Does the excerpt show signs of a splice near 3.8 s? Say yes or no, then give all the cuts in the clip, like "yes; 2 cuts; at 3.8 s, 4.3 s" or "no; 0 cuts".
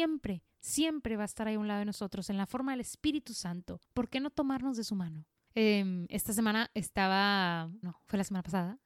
yes; 3 cuts; at 3.8 s, 5.5 s, 7.8 s